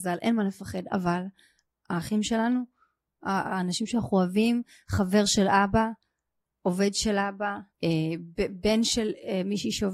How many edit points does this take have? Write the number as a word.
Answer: one